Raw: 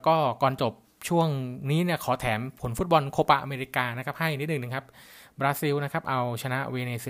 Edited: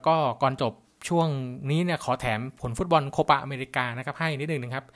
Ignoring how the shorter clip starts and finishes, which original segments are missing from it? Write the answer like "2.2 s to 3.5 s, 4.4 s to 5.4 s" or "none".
none